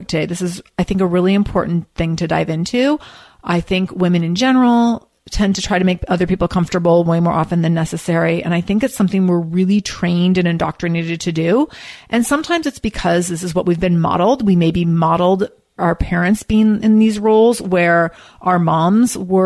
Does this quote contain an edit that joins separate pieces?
no; 0 cuts

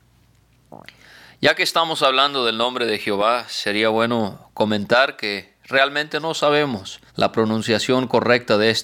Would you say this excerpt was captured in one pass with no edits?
no; 1 cut; at 7.1 s

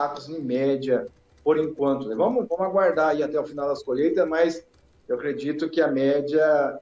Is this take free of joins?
yes; 0 cuts

